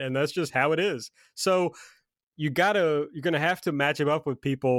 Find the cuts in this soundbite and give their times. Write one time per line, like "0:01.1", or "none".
none

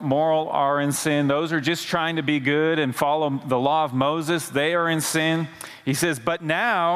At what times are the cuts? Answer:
none

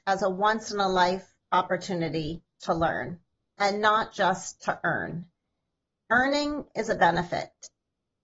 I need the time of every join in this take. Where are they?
none

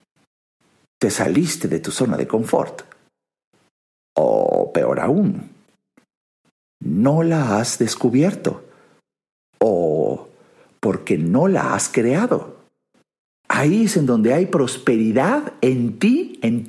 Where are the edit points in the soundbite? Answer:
0:13.4

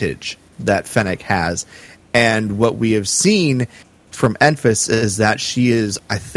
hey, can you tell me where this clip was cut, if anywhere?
none

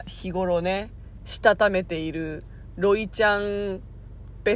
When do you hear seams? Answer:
none

